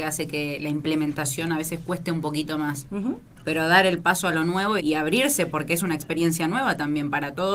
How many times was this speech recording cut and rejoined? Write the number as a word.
two